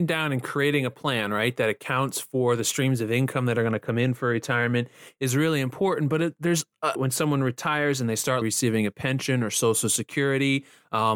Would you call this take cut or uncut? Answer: cut